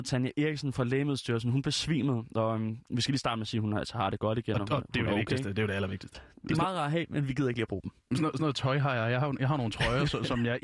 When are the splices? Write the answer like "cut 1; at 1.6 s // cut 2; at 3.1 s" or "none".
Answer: cut 1; at 6.1 s